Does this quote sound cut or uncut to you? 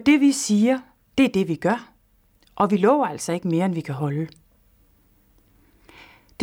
uncut